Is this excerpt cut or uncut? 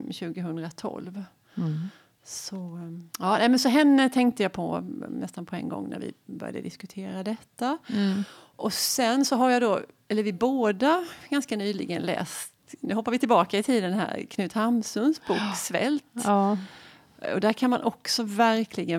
cut